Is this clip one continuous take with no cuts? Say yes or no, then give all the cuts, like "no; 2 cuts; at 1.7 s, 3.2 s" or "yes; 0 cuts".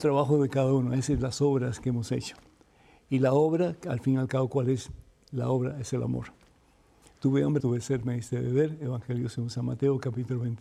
no; 1 cut; at 7.6 s